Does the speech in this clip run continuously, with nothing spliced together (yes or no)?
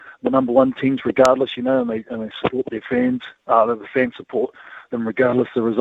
yes